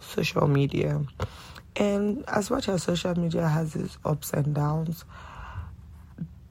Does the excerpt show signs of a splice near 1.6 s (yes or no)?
no